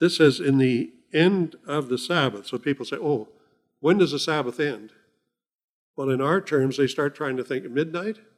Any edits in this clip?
no; 0 cuts

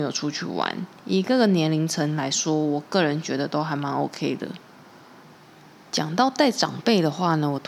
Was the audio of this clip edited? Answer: no; 0 cuts

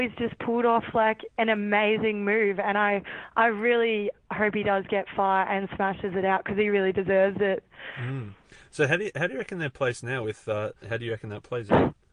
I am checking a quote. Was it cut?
yes; 1 cut; at 10.8 s

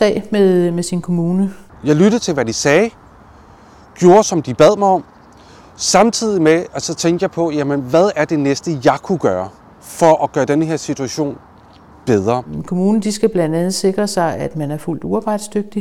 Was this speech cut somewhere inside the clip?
yes; 1 cut; at 1.7 s

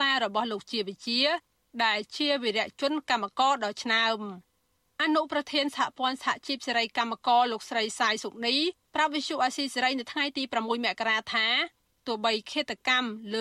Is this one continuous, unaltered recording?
yes; 0 cuts

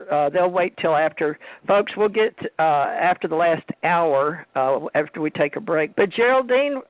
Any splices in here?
yes; 1 cut; at 5.9 s

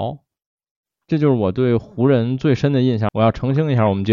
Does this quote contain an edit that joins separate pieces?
yes; 1 cut; at 3.1 s

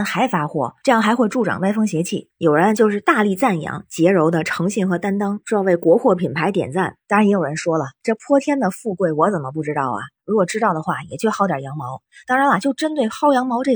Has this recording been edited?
yes; 1 cut; at 2.3 s

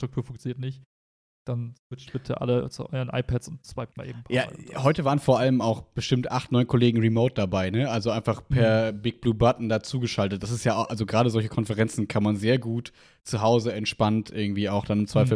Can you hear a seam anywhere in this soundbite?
no; 0 cuts

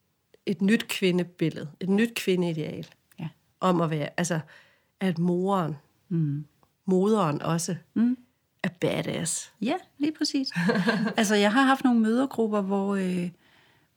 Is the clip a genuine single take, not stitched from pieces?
yes; 0 cuts

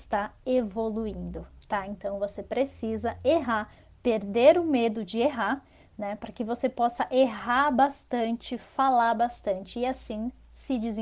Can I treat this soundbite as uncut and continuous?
yes; 0 cuts

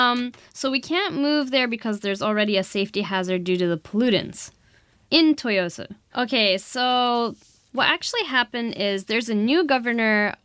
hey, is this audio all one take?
no; 1 cut; at 6.1 s

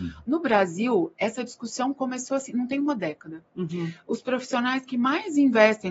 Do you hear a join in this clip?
no; 0 cuts

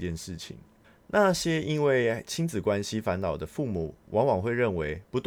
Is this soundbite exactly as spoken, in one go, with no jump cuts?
yes; 0 cuts

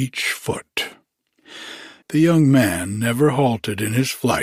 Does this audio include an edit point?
yes; 1 cut; at 2.0 s

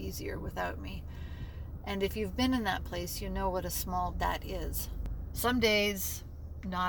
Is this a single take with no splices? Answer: no; 2 cuts; at 4.1 s, 5.3 s

